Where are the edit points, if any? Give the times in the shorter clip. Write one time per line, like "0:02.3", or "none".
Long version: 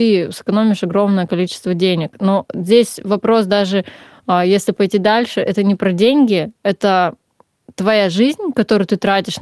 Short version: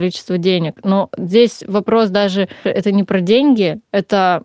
0:02.6